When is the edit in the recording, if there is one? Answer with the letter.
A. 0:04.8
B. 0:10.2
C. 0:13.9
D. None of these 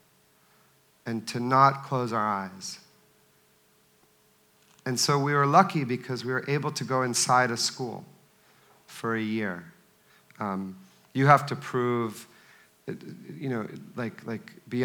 B